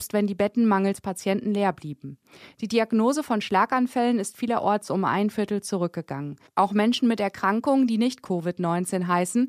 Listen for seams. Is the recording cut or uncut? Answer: cut